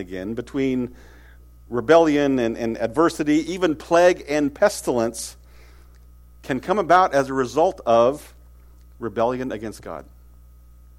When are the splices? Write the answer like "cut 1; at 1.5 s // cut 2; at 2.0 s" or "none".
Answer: none